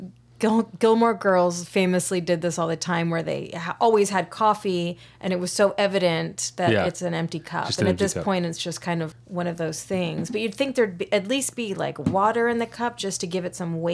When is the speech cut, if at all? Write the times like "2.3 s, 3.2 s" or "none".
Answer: 9.1 s